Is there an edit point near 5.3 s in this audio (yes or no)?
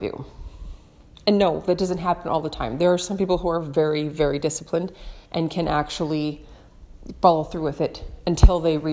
yes